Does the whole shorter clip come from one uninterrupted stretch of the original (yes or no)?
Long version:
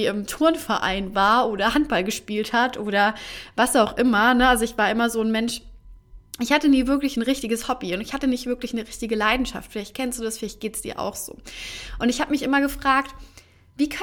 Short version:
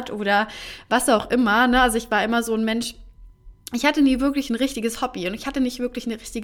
yes